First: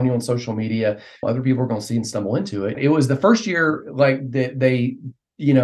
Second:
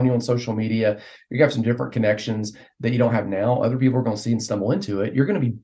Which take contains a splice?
first; 2 cuts; at 1.2 s, 2.7 s

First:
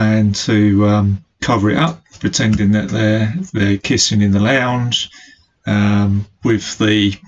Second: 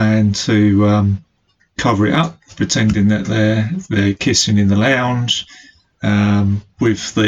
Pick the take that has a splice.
first; 1 cut; at 1.3 s

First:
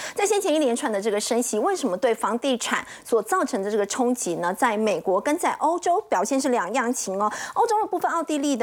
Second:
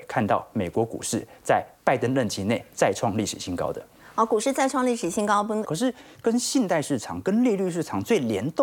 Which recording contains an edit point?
second; 1 cut; at 5.6 s

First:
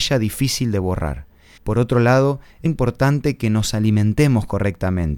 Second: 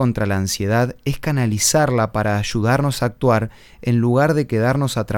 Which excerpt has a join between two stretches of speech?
first; 2 cuts; at 1.6 s, 2.7 s

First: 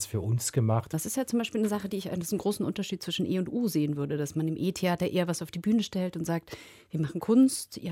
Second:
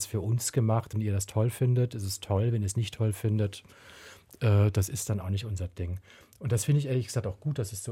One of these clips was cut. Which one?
first; 1 cut; at 0.9 s

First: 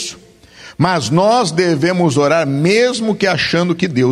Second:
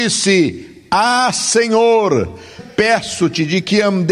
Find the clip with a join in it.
second; 1 cut; at 2.6 s

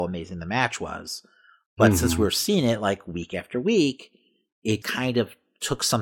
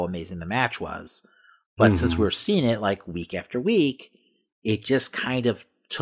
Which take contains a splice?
first; 1 cut; at 4.8 s

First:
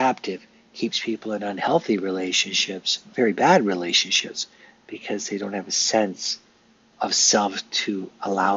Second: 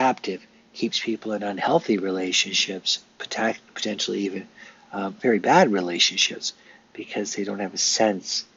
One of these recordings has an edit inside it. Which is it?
first; 2 cuts; at 3.0 s, 6.9 s

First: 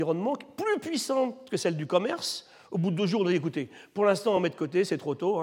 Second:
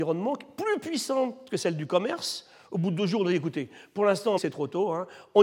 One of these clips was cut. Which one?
second; 1 cut; at 4.4 s

